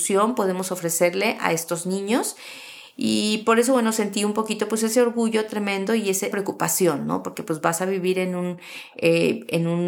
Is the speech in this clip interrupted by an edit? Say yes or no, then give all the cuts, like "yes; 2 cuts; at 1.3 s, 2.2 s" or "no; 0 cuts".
yes; 1 cut; at 6.3 s